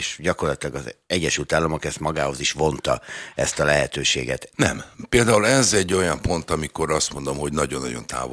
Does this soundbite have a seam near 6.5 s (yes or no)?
no